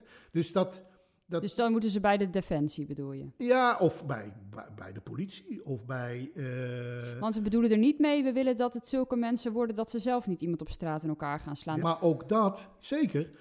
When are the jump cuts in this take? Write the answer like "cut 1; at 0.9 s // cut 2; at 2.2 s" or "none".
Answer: cut 1; at 11.8 s